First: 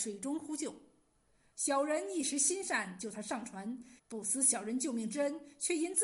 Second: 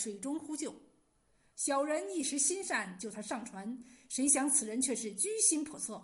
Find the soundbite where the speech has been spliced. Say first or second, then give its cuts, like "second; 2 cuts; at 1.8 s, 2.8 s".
first; 1 cut; at 4.0 s